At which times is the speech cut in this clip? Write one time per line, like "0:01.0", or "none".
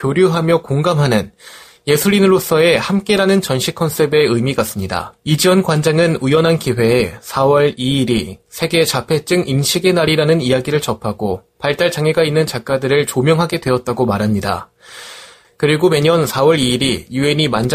0:05.2
0:15.4

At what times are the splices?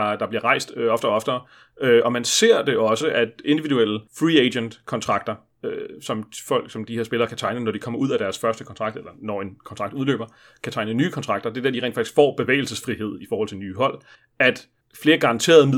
0:03.0
0:04.1

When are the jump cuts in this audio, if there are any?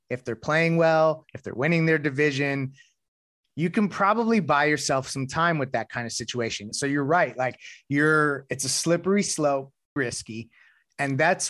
0:01.3
0:06.7
0:10.0

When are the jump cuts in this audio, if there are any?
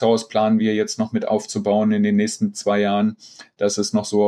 none

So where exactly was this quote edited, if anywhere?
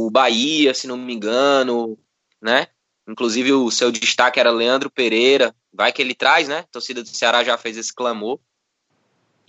0:03.0

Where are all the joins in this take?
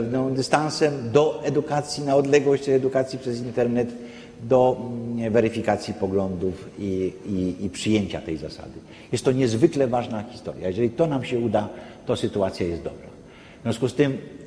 none

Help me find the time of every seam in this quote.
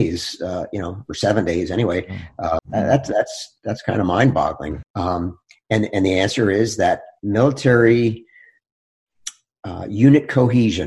0:02.6
0:04.8

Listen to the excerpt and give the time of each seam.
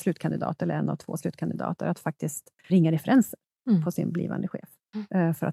0:02.7

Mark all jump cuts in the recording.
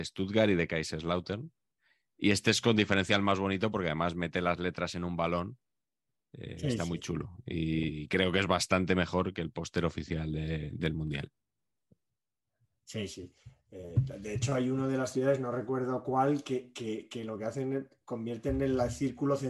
none

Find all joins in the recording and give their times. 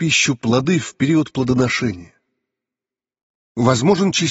none

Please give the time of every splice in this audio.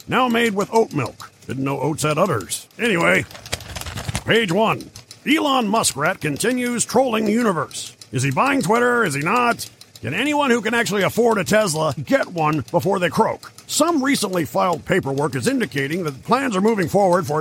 0:12.0

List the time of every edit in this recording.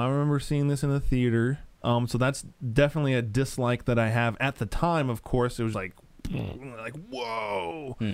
0:01.8
0:05.7

